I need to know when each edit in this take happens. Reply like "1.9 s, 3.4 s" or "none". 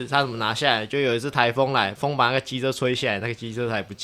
none

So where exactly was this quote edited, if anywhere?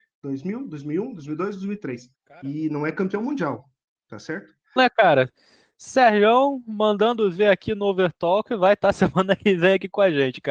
2.1 s, 4.8 s

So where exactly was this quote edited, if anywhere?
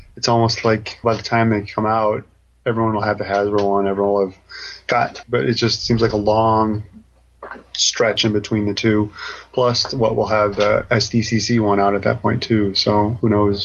1.0 s, 5.2 s

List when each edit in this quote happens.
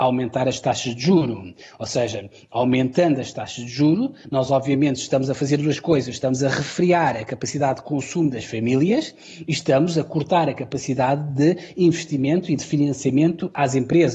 none

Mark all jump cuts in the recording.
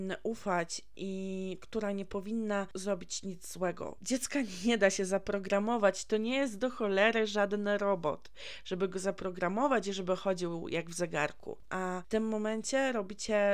4.0 s, 11.6 s

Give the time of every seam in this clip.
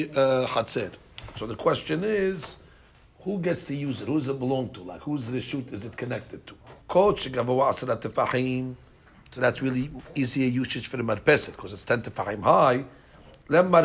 6.8 s

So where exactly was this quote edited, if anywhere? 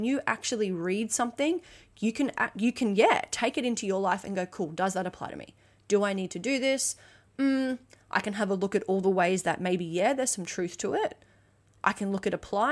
none

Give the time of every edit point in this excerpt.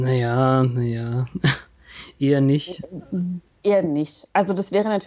none

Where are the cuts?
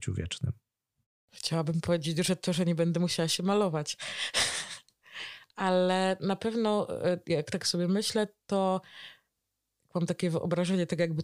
none

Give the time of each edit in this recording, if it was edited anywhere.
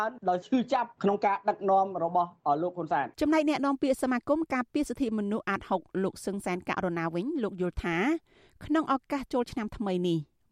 3.1 s

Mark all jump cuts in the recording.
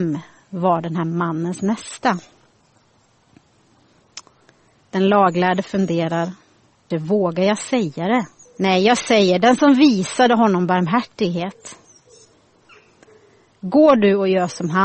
6.9 s, 8.5 s

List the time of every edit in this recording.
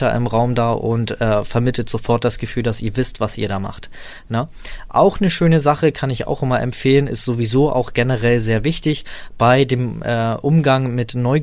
none

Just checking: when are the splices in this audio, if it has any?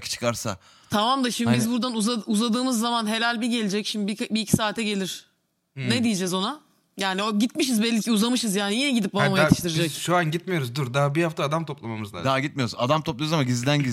none

